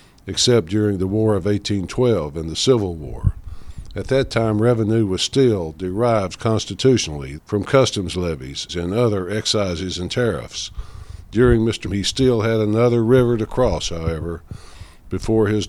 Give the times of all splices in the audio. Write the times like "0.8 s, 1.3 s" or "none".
7.4 s, 8.7 s, 11.8 s